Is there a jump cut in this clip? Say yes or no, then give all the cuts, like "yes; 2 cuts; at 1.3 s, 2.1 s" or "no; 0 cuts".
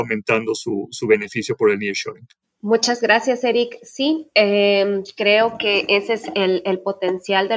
no; 0 cuts